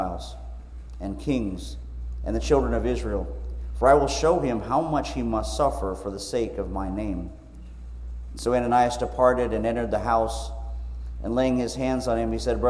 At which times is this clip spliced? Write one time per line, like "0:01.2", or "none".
none

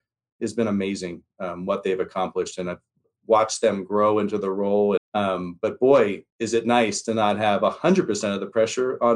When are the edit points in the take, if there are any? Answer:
0:05.0
0:06.3

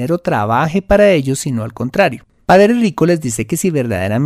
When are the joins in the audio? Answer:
0:02.3

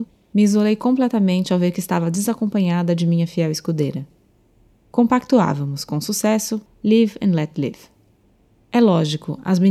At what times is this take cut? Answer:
0:04.9
0:06.7

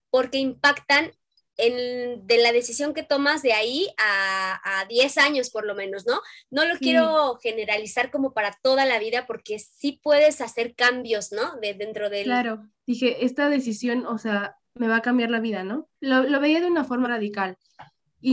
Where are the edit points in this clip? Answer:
0:12.7
0:16.0
0:17.0

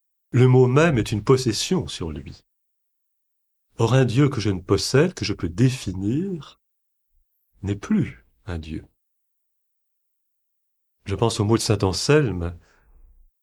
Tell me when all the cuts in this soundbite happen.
none

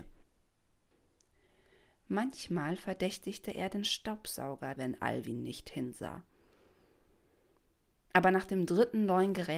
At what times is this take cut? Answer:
0:04.7

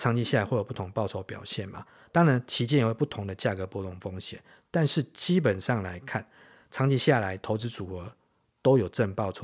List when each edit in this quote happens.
none

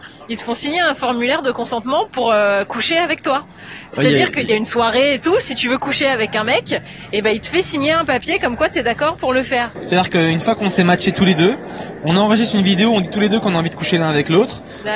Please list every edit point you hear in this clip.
0:09.7

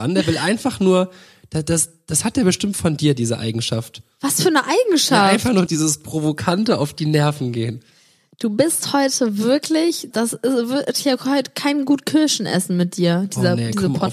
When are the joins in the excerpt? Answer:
0:05.7
0:10.1

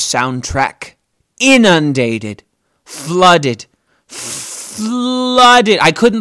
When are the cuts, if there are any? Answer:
none

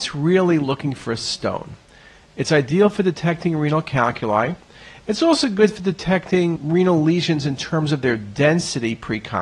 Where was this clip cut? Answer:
0:06.6

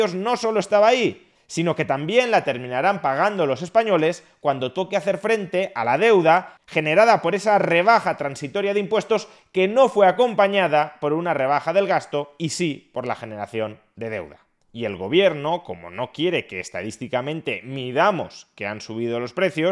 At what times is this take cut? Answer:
0:14.6

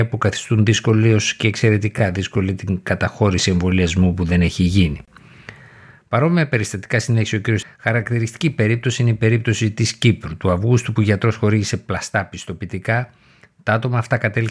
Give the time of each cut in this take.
0:07.6

